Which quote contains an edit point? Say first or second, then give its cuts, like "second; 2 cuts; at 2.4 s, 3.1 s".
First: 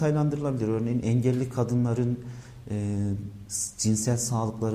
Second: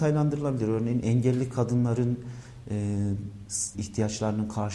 second; 1 cut; at 3.7 s